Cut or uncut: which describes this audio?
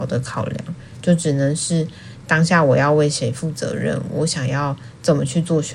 cut